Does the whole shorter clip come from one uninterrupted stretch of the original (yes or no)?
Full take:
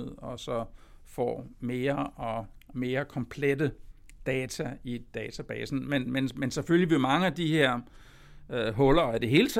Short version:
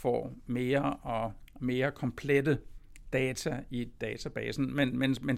yes